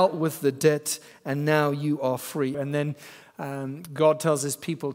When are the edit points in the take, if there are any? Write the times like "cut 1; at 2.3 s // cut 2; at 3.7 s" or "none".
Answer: cut 1; at 2.5 s